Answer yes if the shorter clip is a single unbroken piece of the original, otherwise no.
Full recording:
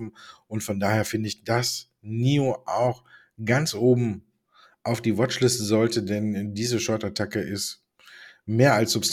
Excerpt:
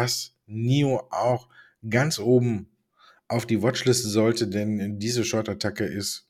yes